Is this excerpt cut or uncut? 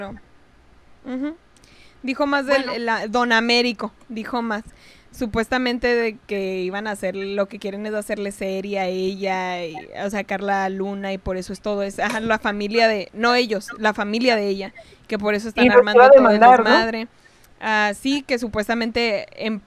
uncut